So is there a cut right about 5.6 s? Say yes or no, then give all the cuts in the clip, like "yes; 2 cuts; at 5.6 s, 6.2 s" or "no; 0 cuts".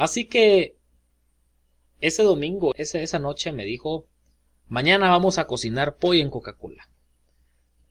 no; 1 cut; at 2.7 s